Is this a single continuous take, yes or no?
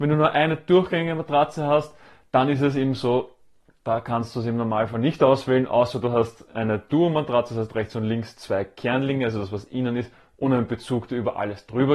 yes